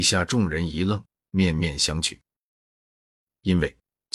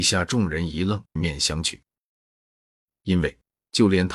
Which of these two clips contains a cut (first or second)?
second